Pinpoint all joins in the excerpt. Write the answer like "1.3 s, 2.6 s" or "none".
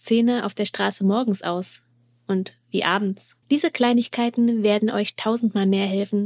3.4 s

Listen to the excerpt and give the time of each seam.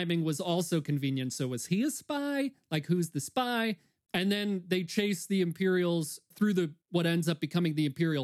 none

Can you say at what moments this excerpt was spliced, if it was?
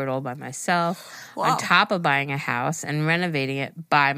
none

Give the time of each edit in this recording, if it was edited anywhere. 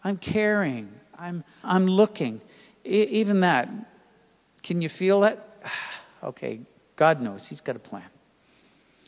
1.6 s

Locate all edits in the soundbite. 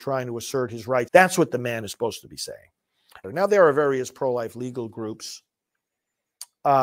1.1 s, 3.2 s

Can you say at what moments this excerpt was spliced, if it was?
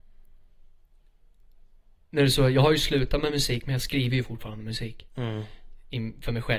none

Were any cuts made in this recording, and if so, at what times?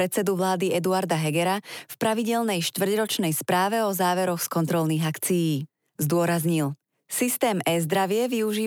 6.0 s

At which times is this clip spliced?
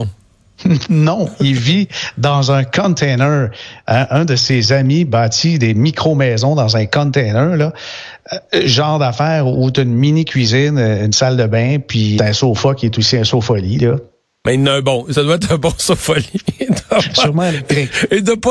4.1 s, 12.2 s

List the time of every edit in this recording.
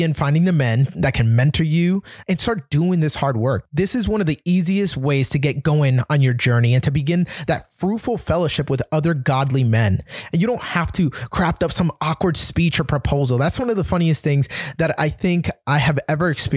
2.2 s

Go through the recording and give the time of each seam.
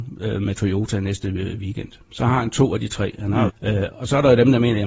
3.5 s

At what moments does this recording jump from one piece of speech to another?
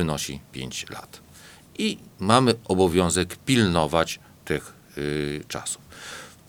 none

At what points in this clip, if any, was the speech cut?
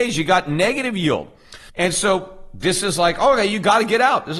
1.7 s

